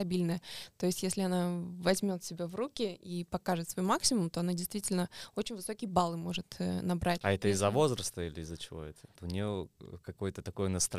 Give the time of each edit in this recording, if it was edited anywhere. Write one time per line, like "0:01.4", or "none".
0:07.2
0:09.2